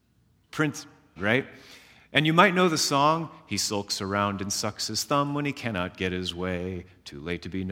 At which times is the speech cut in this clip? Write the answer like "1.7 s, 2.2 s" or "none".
1.2 s